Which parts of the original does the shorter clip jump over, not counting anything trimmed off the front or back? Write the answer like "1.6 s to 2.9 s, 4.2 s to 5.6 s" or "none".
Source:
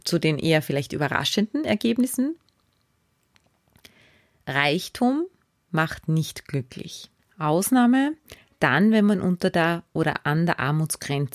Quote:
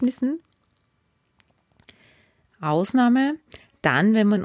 4.4 s to 7.3 s